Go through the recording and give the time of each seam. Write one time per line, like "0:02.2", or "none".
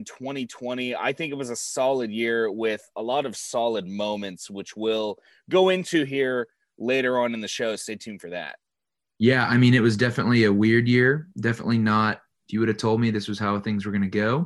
none